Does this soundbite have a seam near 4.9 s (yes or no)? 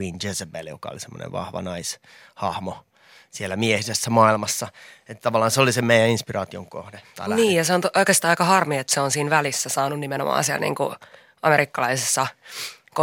no